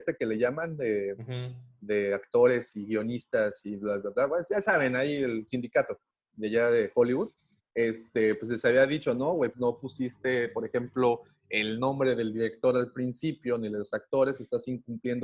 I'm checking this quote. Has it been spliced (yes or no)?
yes